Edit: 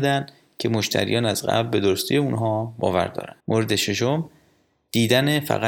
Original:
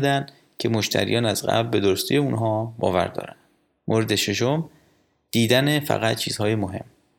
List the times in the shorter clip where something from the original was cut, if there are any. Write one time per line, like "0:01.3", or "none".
0:03.4